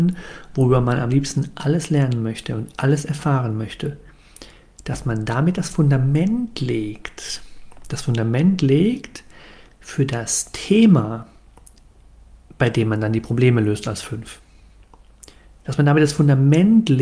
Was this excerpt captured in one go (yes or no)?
yes